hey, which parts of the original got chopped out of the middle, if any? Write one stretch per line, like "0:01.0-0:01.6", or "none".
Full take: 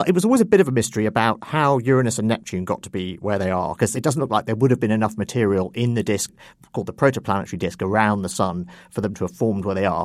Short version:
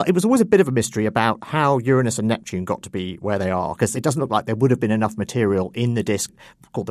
none